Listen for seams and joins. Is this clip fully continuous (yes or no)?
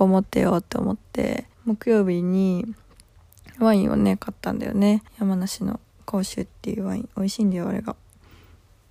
no